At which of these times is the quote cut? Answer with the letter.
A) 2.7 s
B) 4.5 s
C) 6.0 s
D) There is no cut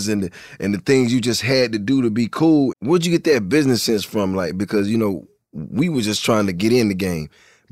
A